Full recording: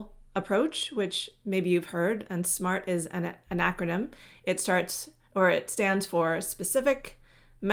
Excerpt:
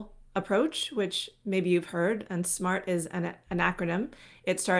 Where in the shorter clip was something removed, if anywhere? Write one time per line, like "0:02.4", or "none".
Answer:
none